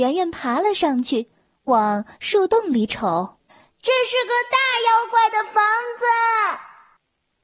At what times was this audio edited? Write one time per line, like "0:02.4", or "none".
0:03.5